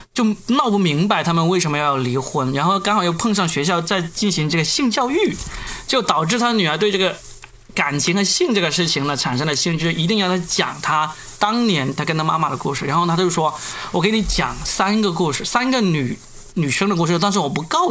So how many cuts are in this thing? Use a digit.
0